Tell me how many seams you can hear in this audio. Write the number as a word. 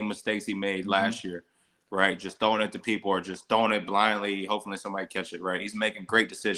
zero